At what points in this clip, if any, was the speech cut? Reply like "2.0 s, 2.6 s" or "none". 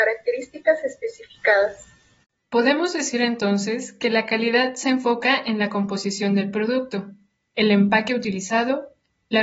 2.4 s, 7.4 s